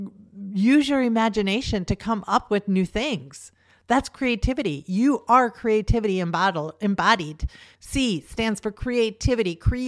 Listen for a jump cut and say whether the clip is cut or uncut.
cut